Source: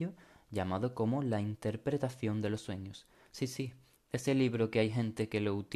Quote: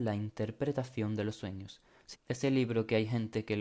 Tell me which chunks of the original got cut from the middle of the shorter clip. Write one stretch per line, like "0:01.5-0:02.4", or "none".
0:03.4-0:04.0